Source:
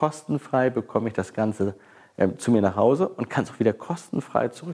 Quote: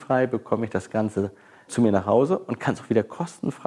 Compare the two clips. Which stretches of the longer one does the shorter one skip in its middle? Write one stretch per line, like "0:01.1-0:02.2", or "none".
0:02.1-0:02.4